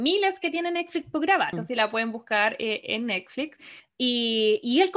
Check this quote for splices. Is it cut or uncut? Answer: cut